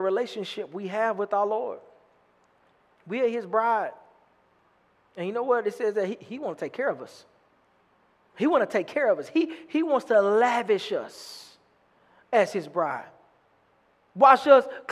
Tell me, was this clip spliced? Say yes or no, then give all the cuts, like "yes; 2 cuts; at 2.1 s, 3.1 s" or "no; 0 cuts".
no; 0 cuts